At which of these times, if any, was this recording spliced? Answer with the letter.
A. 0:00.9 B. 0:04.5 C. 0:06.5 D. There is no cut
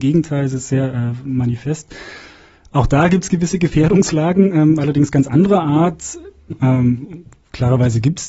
C